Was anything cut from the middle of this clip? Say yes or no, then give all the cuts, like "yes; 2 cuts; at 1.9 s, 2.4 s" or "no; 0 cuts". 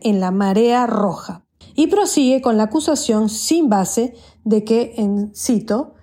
yes; 1 cut; at 1.6 s